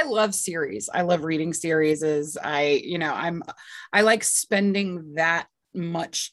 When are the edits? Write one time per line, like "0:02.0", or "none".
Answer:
none